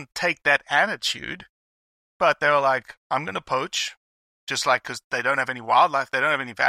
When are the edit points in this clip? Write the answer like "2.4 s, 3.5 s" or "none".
3.0 s